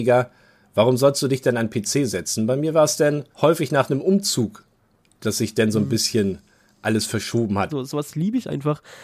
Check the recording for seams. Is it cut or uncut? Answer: cut